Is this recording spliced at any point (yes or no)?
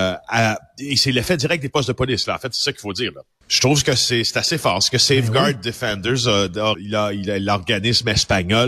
yes